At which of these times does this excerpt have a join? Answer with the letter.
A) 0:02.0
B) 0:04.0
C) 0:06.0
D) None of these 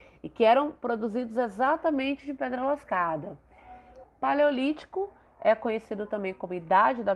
B